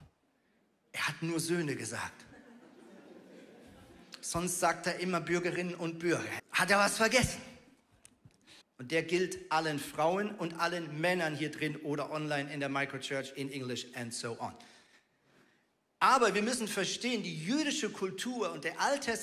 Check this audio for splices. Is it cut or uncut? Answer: cut